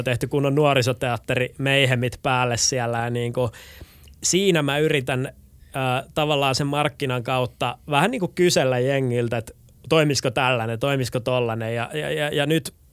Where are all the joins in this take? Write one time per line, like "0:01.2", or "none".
none